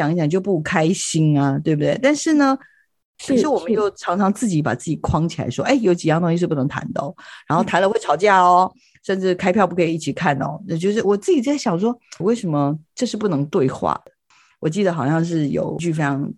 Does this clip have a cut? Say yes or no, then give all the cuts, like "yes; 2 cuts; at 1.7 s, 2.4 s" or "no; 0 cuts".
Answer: yes; 3 cuts; at 3.2 s, 11.0 s, 12.2 s